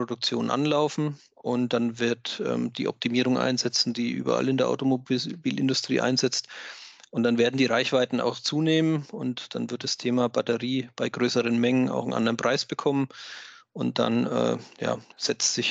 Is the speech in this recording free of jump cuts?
yes; 0 cuts

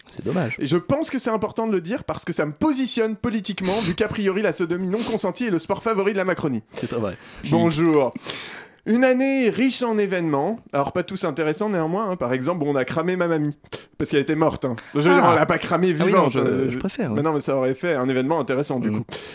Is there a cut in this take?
yes; 2 cuts; at 7.4 s, 17.4 s

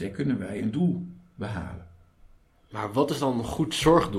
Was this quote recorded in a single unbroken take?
yes; 0 cuts

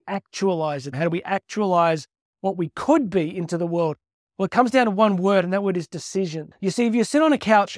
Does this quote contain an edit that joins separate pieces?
yes; 1 cut; at 0.9 s

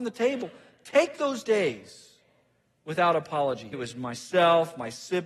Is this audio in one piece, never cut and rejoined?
no; 1 cut; at 3.7 s

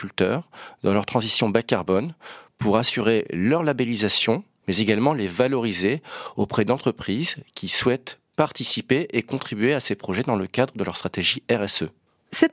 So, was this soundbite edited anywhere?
yes; 1 cut; at 4.6 s

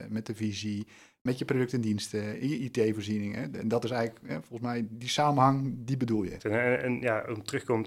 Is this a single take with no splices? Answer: no; 1 cut; at 6.4 s

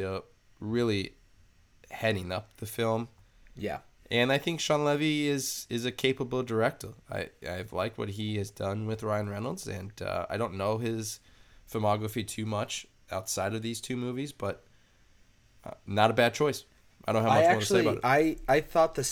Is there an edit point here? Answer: no; 0 cuts

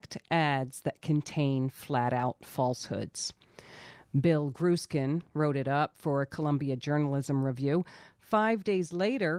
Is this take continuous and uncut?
yes; 0 cuts

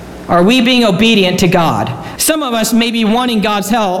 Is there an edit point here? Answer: yes; 1 cut; at 2.2 s

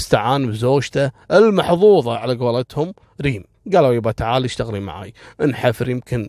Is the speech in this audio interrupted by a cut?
yes; 1 cut; at 3.5 s

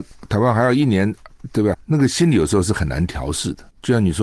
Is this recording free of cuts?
no; 1 cut; at 1.7 s

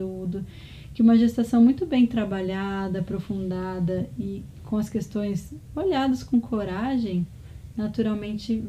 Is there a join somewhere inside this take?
no; 0 cuts

